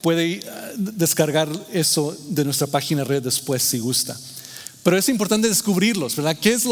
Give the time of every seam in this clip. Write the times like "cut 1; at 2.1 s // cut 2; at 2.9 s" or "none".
none